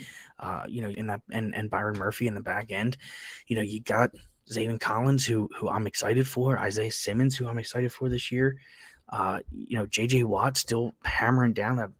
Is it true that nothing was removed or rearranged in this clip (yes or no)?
no